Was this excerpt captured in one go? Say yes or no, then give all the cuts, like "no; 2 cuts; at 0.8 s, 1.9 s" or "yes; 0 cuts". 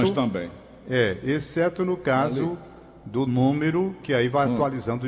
yes; 0 cuts